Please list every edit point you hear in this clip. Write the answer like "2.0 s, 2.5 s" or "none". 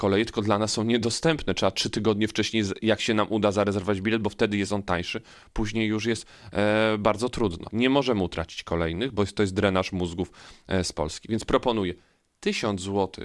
7.7 s